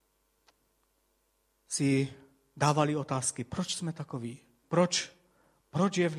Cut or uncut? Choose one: cut